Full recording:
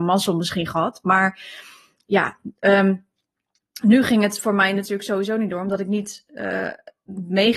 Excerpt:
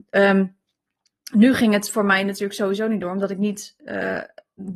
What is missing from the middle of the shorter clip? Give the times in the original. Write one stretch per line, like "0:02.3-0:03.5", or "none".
none